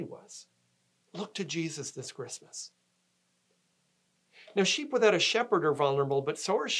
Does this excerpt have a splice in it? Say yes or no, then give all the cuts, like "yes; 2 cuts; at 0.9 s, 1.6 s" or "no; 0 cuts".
yes; 1 cut; at 1.0 s